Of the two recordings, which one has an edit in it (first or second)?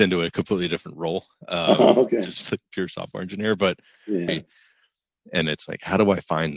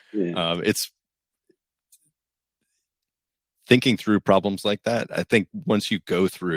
first